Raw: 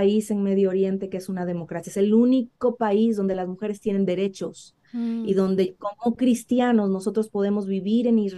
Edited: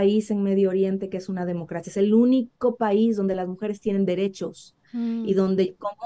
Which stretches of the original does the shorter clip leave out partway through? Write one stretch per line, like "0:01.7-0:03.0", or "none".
none